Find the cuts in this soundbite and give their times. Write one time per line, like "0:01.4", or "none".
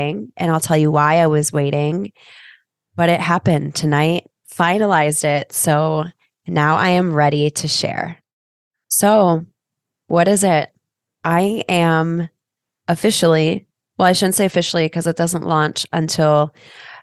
none